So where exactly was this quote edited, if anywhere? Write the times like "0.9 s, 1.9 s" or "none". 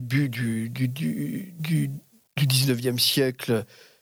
none